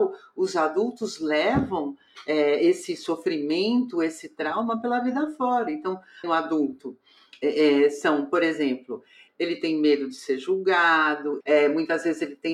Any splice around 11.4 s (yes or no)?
yes